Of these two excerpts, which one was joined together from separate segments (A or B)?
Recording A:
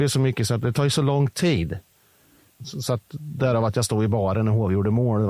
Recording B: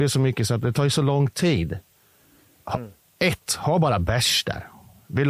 A